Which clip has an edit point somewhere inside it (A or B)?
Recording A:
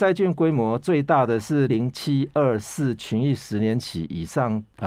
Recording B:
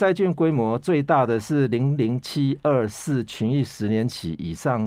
A